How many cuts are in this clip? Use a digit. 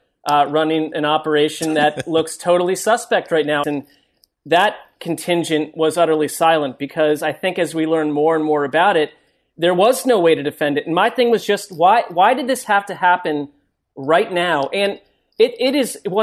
1